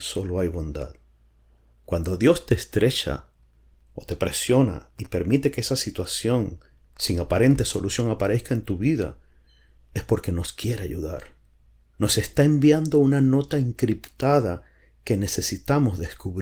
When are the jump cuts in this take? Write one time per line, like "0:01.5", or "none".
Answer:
none